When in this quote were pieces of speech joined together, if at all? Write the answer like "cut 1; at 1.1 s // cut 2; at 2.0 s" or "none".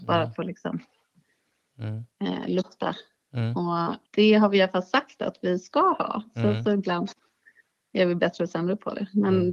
cut 1; at 4.1 s